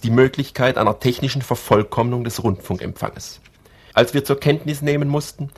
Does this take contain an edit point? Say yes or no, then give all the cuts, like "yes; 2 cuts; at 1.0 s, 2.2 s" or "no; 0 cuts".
yes; 1 cut; at 3.9 s